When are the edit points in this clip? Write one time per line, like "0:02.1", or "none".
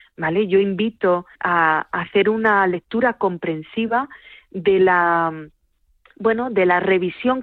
0:01.3